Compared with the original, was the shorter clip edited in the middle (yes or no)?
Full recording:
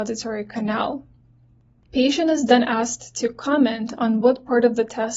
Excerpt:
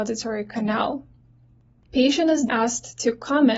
yes